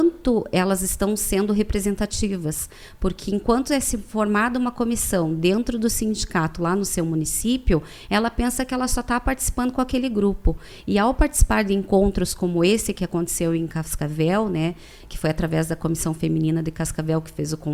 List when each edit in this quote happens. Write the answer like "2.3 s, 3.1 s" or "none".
none